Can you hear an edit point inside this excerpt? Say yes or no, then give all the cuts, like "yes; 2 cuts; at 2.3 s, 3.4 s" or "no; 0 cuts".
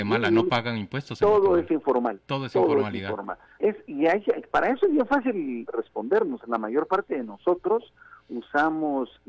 yes; 1 cut; at 3.6 s